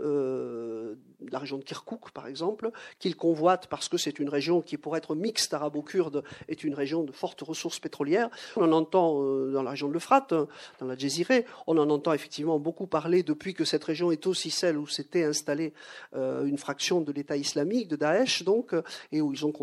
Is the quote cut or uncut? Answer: cut